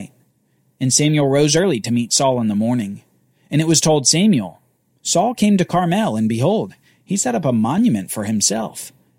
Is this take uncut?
yes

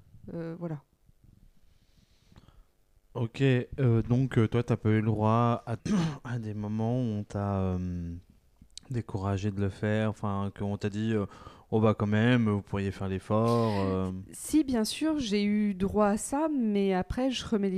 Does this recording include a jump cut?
yes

